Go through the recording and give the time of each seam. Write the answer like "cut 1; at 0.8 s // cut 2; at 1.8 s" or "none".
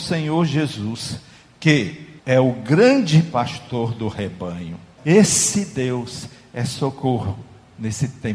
cut 1; at 2.2 s // cut 2; at 5.0 s